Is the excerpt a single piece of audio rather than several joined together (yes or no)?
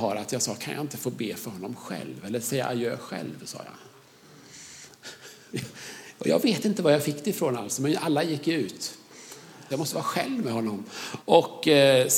no